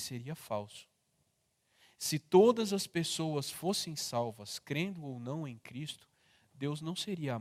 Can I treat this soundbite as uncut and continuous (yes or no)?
yes